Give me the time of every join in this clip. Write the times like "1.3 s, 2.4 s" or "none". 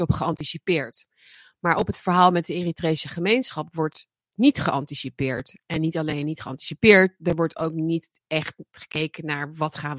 none